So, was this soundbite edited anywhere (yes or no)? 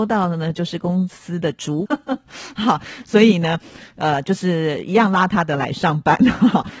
yes